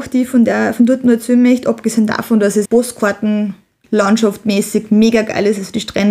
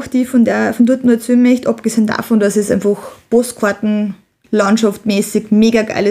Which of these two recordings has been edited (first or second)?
first